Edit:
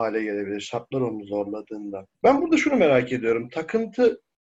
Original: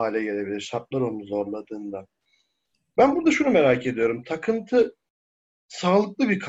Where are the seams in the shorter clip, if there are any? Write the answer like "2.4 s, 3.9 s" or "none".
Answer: 2.1 s

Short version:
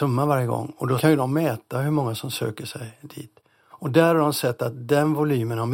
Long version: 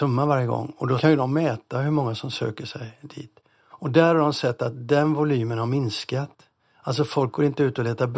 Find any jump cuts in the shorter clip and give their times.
none

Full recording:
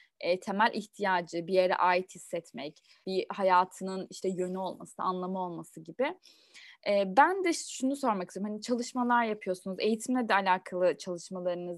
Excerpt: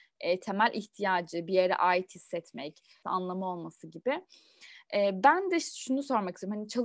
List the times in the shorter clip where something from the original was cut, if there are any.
3.0 s

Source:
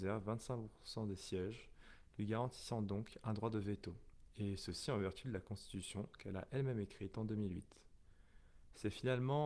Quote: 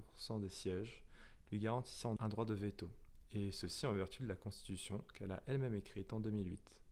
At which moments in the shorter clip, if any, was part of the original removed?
2.2 s

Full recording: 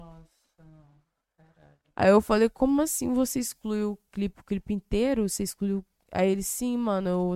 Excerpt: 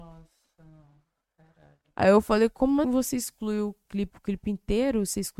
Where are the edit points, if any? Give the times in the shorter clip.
2.8 s

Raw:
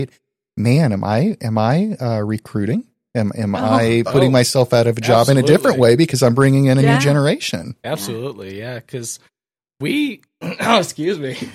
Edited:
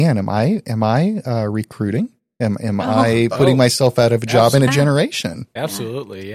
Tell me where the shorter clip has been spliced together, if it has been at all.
4.7 s

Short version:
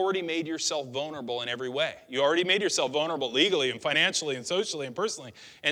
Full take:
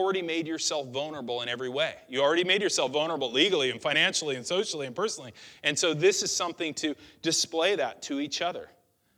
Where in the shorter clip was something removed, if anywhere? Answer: none

